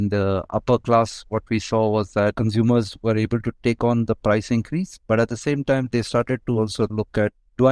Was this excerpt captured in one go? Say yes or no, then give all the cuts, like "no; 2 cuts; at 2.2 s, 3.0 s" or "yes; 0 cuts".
yes; 0 cuts